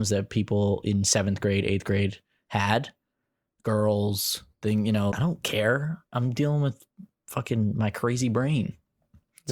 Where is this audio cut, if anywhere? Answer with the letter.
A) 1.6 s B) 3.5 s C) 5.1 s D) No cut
C